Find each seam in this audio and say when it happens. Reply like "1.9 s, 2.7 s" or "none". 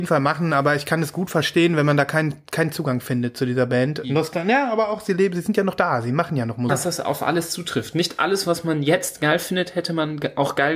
4.0 s, 6.7 s